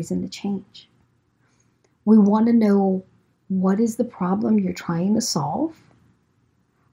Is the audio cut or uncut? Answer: uncut